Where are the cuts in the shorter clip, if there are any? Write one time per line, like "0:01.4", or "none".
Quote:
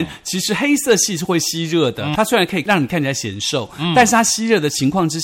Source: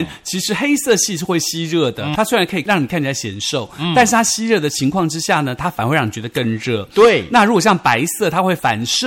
none